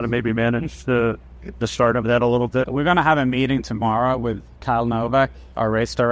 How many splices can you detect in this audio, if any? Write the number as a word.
one